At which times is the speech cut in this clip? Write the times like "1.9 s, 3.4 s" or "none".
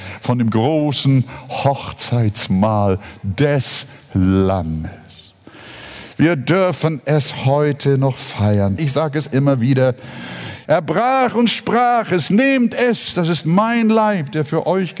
8.8 s, 10.7 s